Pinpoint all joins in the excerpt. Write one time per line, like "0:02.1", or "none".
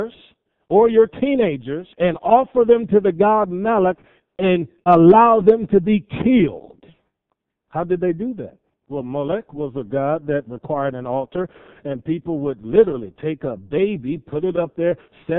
0:01.9